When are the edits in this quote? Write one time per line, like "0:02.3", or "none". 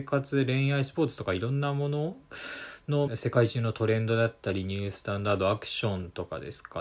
0:03.1